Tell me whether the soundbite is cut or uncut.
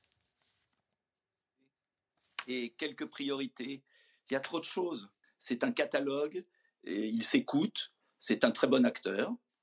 cut